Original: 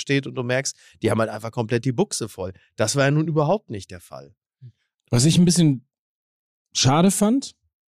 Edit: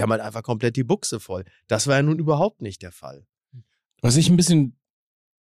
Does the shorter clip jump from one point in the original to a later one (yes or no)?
no